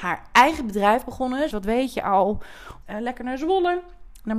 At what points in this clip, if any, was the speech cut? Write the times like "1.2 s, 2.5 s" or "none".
1.5 s, 2.8 s